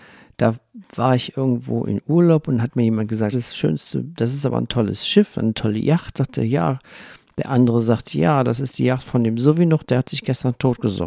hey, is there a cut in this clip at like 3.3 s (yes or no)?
yes